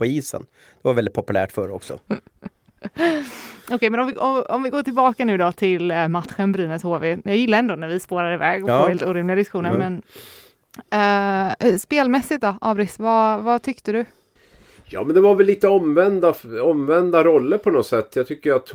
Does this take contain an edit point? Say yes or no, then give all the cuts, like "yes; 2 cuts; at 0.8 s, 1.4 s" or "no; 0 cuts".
no; 0 cuts